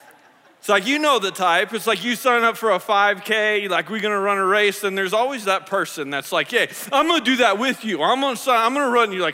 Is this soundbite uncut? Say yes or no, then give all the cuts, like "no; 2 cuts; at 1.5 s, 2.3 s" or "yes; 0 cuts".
yes; 0 cuts